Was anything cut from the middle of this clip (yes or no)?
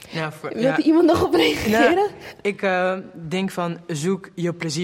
no